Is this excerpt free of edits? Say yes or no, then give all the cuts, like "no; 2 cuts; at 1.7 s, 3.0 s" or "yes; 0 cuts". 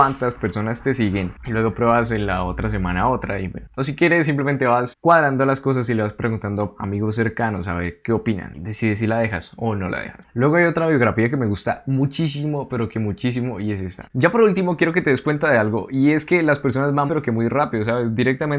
no; 2 cuts; at 14.0 s, 17.1 s